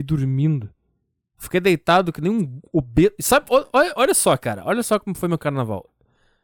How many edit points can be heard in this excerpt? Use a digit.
0